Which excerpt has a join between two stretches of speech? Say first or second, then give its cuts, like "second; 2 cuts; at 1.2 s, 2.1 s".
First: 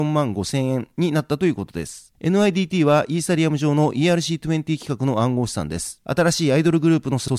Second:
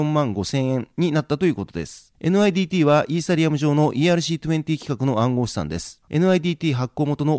second; 1 cut; at 6.0 s